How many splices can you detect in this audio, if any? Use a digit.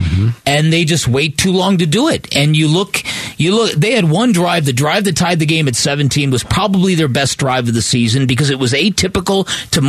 0